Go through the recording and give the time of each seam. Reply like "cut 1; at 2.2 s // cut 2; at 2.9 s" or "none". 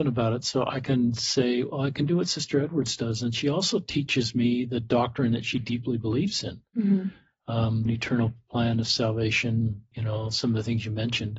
cut 1; at 7.9 s // cut 2; at 9.9 s

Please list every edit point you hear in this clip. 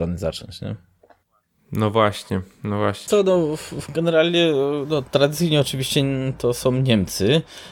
cut 1; at 3.1 s

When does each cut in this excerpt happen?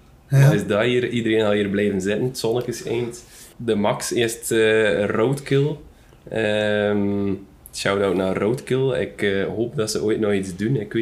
cut 1; at 3.5 s

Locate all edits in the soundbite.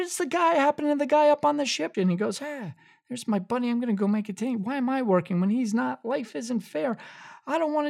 cut 1; at 1.9 s

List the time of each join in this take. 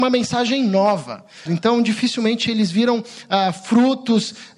cut 1; at 1.5 s

